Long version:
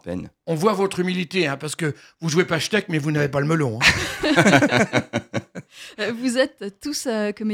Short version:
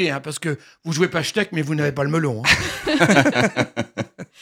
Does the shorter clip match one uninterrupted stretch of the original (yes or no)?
yes